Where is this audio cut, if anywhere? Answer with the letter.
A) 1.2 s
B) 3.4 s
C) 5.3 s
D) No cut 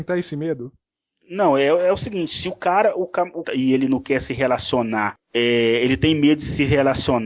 B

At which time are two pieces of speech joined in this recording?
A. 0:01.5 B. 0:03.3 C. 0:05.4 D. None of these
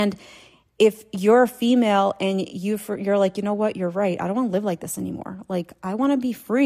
D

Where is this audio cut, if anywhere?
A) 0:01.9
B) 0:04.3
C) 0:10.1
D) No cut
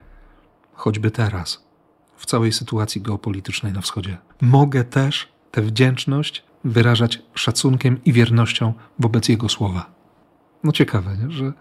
B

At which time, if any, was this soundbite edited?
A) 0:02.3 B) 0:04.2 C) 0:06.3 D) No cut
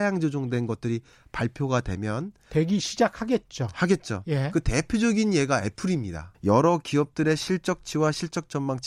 C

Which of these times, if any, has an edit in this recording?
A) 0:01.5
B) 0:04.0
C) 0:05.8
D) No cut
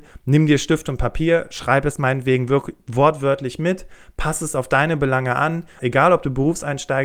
C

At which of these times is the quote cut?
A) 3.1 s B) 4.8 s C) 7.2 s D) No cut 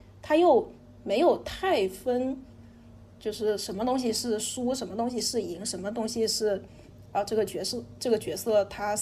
D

